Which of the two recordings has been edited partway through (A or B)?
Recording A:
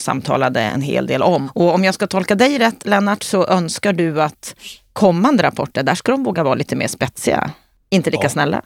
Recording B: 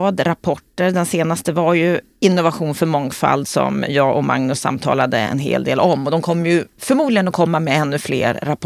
A